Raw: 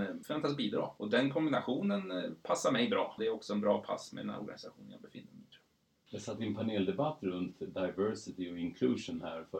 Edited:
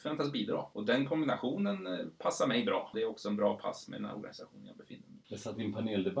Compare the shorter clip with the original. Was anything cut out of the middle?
yes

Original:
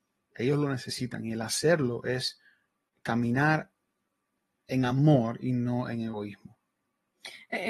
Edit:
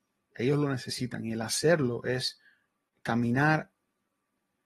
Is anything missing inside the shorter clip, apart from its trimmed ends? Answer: no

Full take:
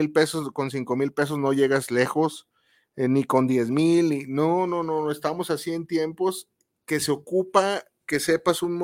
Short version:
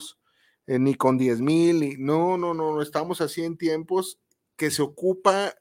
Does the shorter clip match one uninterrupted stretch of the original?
yes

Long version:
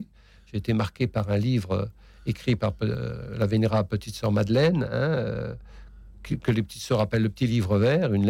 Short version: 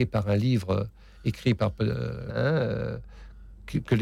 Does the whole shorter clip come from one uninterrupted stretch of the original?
no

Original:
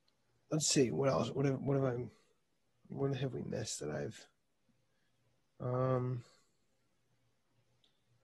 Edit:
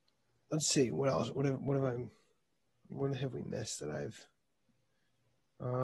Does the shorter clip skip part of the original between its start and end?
no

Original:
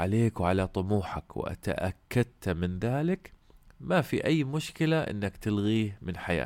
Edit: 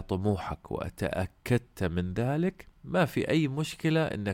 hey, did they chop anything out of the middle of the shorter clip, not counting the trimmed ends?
yes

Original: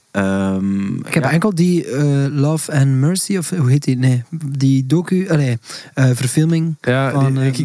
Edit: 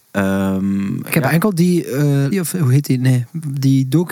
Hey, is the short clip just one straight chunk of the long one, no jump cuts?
no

